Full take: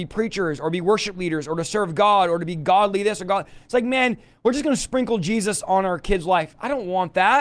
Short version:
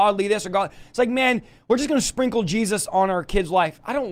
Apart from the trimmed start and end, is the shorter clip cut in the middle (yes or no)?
no